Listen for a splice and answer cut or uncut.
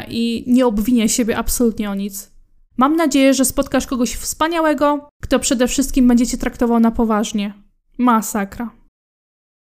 uncut